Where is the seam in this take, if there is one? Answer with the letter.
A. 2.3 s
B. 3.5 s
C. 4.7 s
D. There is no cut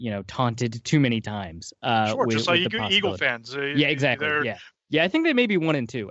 C